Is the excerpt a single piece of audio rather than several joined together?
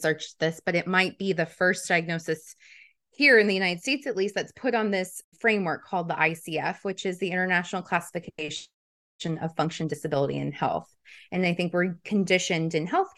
no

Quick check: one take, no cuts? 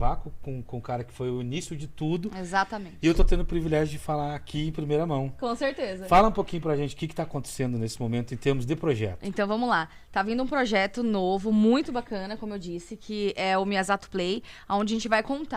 yes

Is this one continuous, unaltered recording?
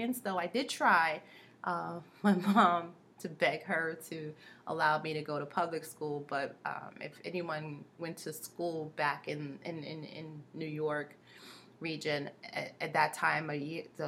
yes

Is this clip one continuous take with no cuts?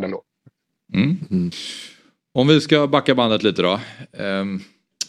yes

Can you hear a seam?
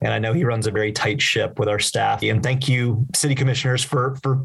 yes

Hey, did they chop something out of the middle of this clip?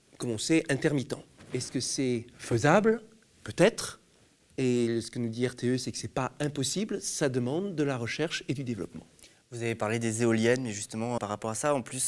yes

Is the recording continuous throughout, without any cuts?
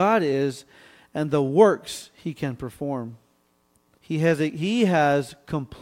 no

